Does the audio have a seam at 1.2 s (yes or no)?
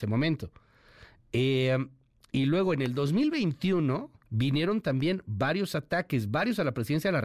yes